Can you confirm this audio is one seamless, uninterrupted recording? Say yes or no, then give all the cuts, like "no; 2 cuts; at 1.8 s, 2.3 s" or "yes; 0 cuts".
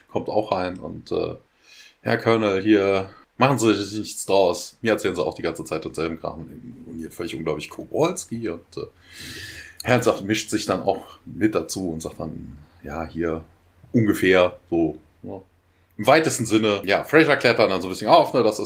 no; 1 cut; at 3.2 s